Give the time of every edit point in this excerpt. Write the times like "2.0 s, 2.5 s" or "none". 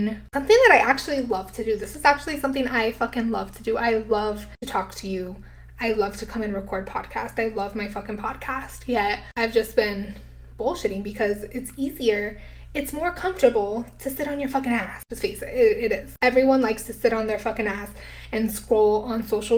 none